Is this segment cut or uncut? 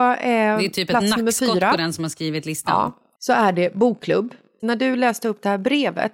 cut